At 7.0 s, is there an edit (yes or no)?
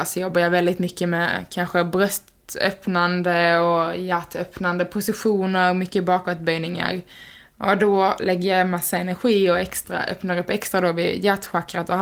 no